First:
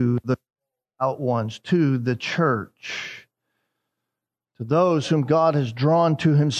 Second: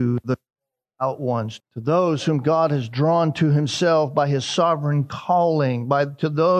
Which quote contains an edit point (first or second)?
second